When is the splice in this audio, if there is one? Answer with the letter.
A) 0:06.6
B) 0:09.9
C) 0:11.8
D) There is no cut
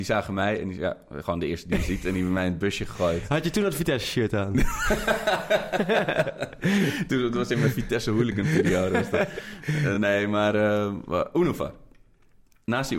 D